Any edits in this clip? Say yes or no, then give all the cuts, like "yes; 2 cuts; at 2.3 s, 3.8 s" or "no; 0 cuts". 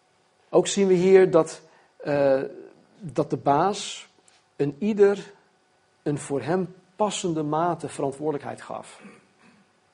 no; 0 cuts